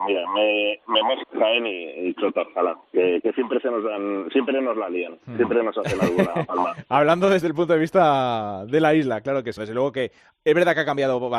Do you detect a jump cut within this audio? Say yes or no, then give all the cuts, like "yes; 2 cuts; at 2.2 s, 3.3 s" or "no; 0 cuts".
yes; 2 cuts; at 1.2 s, 9.6 s